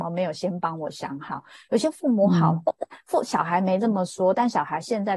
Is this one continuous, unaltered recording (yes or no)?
yes